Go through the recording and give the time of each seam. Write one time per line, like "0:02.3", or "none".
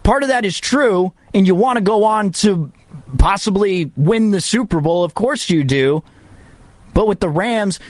none